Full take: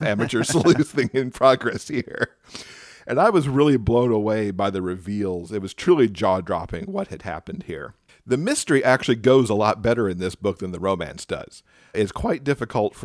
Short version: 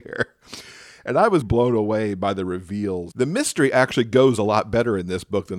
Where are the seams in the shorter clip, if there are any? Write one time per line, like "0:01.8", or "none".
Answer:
0:01.4
0:03.1